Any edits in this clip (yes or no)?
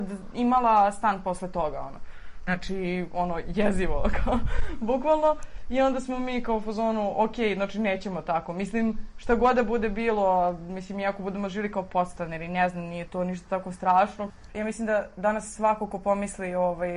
yes